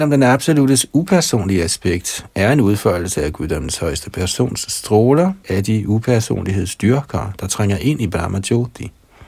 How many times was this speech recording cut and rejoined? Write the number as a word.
one